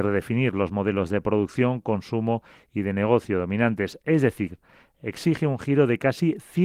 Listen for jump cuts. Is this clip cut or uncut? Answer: uncut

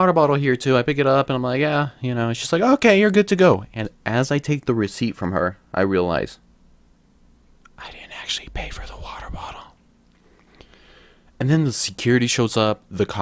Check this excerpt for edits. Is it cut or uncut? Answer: uncut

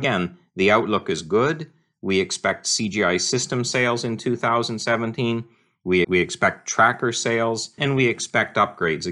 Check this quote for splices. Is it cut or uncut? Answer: cut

